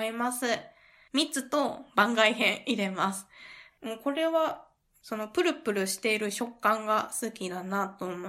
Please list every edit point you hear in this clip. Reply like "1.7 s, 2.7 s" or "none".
3.7 s